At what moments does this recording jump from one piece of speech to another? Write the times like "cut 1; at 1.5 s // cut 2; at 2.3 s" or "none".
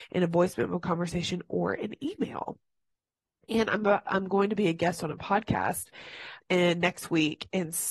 cut 1; at 6.4 s